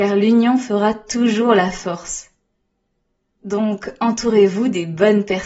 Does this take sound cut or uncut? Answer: cut